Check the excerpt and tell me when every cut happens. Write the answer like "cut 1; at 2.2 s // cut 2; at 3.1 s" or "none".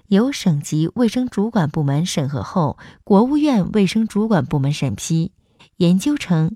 cut 1; at 5.6 s